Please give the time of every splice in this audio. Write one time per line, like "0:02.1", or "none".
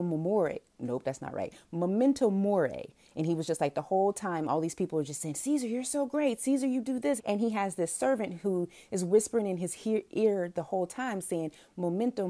0:07.2